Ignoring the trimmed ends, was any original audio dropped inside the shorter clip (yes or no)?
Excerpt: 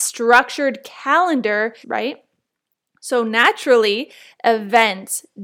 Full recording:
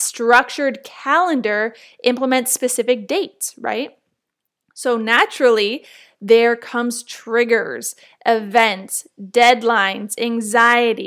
yes